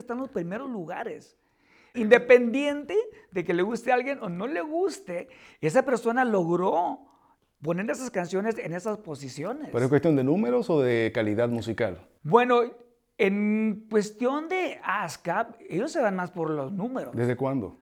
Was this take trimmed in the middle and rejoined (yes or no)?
yes